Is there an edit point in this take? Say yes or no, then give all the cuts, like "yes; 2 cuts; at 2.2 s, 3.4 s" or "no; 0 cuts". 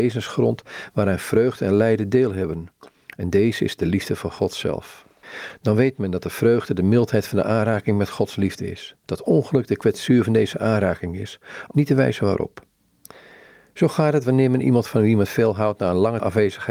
yes; 2 cuts; at 9.0 s, 11.7 s